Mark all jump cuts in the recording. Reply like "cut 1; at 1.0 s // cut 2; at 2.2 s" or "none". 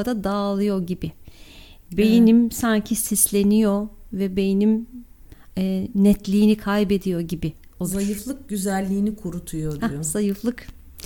none